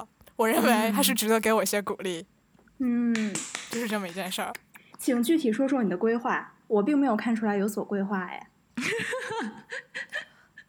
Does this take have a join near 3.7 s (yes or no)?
no